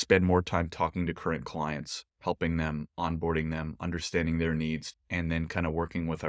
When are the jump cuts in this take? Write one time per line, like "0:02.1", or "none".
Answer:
0:04.9